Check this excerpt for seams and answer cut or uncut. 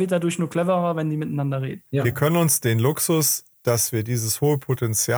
cut